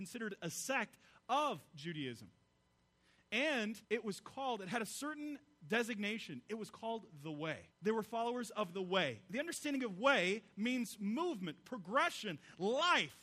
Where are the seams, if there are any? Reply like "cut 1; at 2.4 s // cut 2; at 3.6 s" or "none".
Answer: cut 1; at 3.8 s // cut 2; at 7.7 s